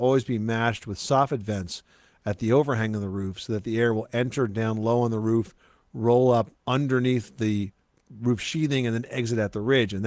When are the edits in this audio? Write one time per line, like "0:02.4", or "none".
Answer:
0:06.6